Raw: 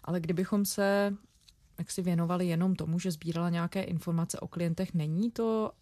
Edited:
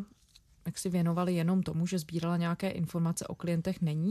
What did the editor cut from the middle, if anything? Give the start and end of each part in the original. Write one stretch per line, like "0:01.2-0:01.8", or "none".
none